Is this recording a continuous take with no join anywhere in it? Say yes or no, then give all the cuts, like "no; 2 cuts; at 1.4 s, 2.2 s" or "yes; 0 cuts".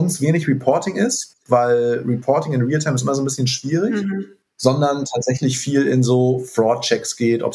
yes; 0 cuts